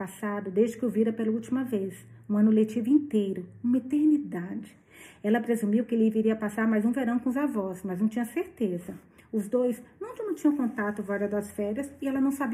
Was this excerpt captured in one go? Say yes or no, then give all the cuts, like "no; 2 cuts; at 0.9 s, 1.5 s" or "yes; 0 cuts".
yes; 0 cuts